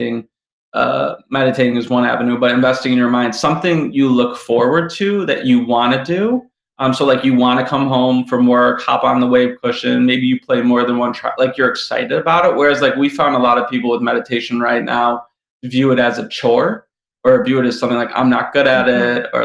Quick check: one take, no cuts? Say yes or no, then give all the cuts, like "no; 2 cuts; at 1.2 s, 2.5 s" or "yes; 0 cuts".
yes; 0 cuts